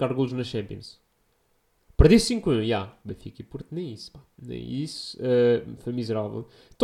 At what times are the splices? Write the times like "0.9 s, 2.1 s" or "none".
3.0 s